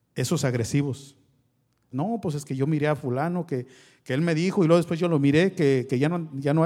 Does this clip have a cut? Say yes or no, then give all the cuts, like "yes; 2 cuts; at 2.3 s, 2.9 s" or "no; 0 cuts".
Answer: yes; 1 cut; at 1.9 s